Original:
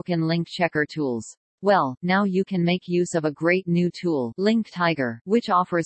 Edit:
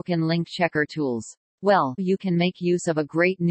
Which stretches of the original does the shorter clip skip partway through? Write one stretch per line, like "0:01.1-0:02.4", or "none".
0:02.0-0:02.2